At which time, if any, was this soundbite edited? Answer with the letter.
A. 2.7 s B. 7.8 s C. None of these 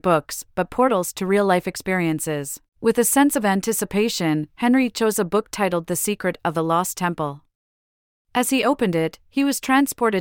A